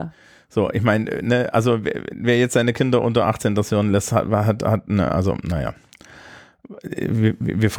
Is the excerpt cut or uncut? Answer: uncut